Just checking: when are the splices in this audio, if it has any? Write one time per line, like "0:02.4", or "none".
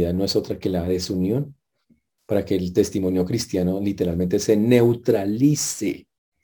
none